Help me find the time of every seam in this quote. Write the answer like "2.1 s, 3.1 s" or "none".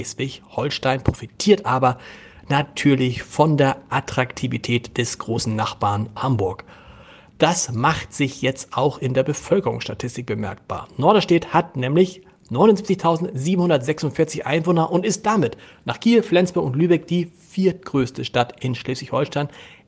6.2 s